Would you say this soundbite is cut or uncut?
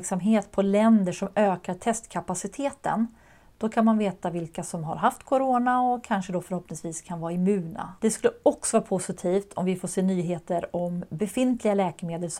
cut